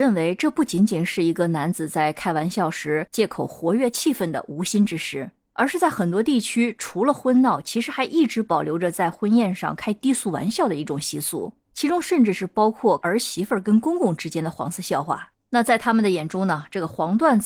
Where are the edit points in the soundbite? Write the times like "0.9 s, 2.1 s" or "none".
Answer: none